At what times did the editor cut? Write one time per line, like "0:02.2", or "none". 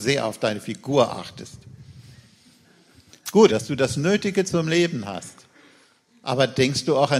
0:03.5